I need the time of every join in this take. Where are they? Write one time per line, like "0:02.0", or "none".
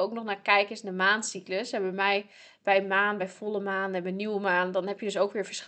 none